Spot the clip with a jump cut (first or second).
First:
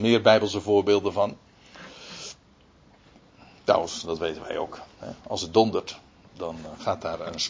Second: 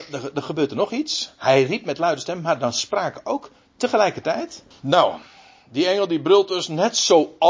second